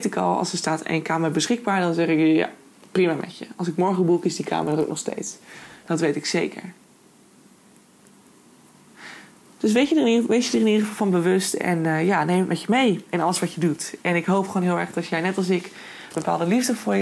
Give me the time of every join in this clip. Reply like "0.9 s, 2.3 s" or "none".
16.1 s